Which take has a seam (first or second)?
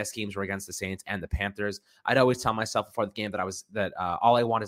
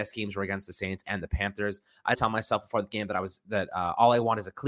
second